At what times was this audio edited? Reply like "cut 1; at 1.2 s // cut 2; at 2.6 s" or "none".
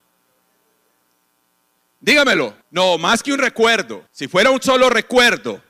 cut 1; at 2.6 s // cut 2; at 4.1 s

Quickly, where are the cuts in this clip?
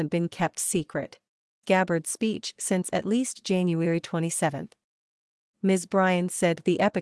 cut 1; at 1.6 s

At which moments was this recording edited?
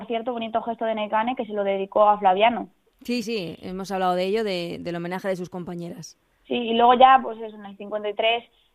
cut 1; at 3.2 s

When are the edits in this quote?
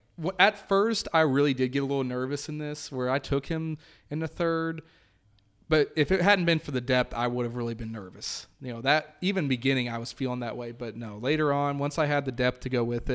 none

